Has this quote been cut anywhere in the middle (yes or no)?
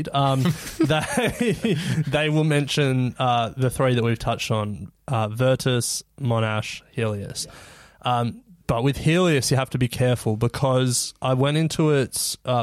no